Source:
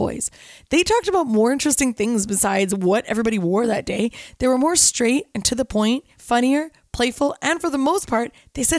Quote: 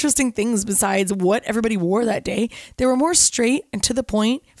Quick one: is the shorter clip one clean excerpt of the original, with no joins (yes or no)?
yes